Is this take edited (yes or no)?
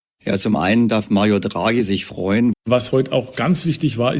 yes